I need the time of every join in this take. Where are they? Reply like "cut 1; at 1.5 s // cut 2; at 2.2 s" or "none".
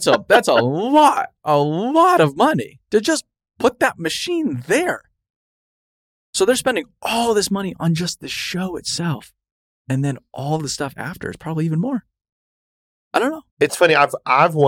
cut 1; at 13.5 s